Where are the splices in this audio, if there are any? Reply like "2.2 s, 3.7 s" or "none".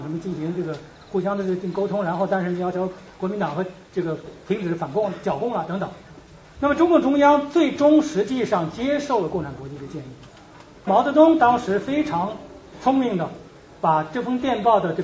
6.5 s, 10.9 s